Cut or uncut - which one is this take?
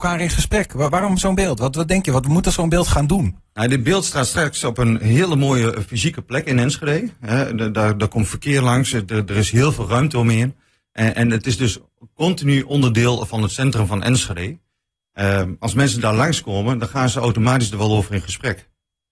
uncut